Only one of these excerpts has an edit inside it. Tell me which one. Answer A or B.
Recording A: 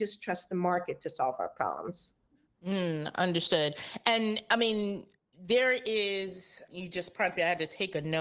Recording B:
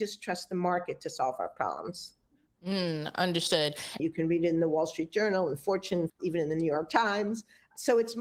B